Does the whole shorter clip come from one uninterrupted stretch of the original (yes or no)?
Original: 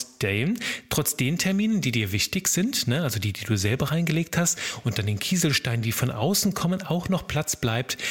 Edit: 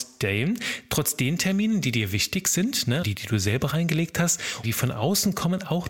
no